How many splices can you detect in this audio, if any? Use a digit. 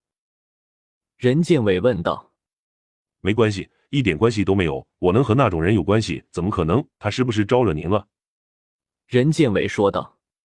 2